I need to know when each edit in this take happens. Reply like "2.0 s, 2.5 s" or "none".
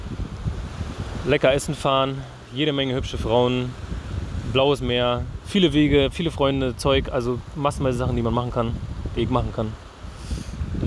5.4 s